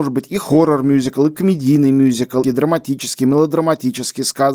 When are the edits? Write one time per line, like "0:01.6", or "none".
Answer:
0:02.4